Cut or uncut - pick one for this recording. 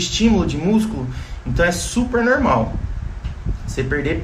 uncut